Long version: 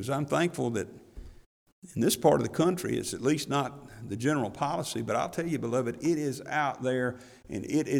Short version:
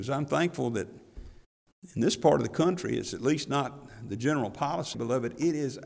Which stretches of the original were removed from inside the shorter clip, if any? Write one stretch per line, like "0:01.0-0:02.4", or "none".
0:04.9-0:05.6